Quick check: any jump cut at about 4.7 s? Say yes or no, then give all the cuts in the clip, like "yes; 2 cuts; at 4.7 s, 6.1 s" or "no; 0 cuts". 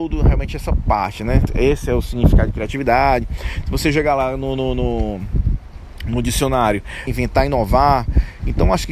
no; 2 cuts; at 1.5 s, 7.1 s